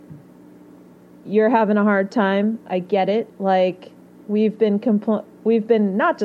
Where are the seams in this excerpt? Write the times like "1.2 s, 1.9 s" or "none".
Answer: 3.3 s